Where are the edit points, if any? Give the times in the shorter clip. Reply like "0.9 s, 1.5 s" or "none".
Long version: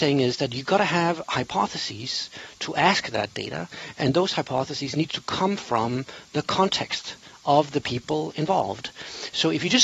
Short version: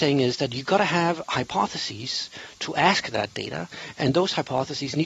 none